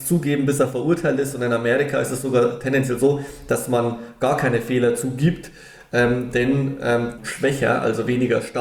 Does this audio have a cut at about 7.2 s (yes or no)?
yes